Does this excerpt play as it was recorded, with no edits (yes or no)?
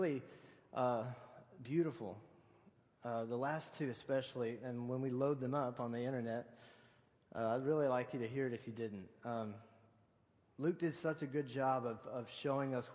yes